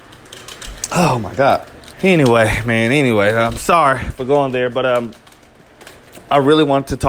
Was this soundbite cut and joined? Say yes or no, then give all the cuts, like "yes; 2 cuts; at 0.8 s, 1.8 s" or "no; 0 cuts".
yes; 1 cut; at 1.9 s